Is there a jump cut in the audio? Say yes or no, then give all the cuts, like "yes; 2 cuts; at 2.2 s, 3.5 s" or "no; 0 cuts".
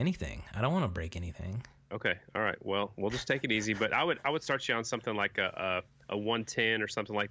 no; 0 cuts